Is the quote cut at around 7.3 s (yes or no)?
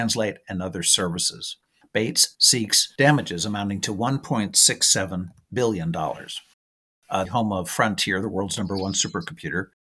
yes